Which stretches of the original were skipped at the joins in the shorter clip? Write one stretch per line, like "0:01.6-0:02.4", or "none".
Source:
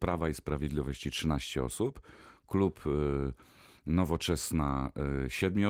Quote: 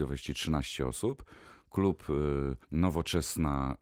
0:03.4-0:03.8